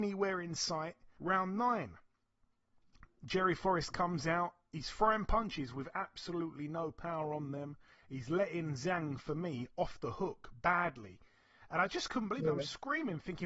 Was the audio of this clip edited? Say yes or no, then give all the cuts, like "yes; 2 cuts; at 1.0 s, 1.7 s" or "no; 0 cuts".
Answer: yes; 1 cut; at 1.2 s